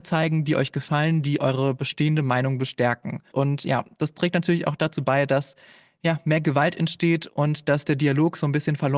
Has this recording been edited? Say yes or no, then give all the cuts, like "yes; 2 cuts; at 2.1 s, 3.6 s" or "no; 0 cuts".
yes; 1 cut; at 3.3 s